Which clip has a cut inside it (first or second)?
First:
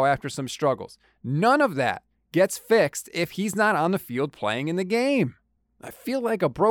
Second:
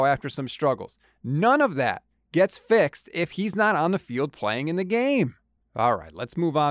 second